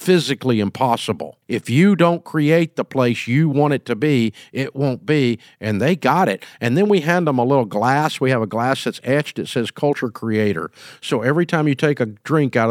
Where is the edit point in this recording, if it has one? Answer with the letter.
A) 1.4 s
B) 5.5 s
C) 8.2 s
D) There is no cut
A